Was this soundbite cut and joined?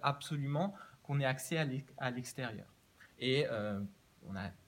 yes; 1 cut; at 3.1 s

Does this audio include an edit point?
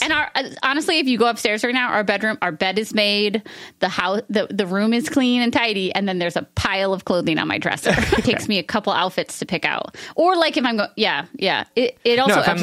yes; 1 cut; at 8.2 s

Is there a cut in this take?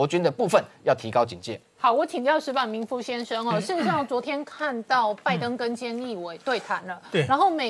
no; 0 cuts

